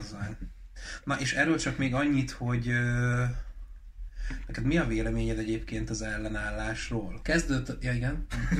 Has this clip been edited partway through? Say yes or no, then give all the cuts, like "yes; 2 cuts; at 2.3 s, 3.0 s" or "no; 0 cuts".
yes; 1 cut; at 7.2 s